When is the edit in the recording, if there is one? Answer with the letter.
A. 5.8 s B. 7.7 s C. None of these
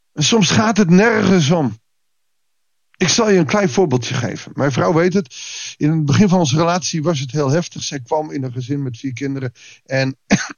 C